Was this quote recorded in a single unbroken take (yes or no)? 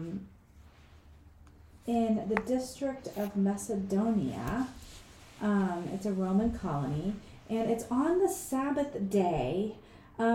yes